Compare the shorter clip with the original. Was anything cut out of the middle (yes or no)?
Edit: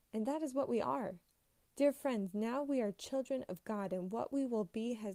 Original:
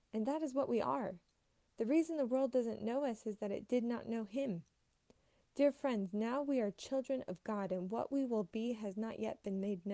yes